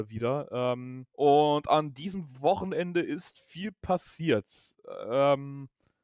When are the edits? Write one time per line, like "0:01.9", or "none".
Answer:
0:01.1